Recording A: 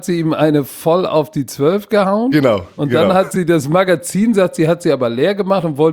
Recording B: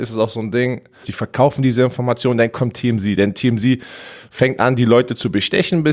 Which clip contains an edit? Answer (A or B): B